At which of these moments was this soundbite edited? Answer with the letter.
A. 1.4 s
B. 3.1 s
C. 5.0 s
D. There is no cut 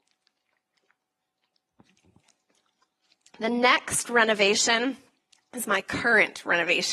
D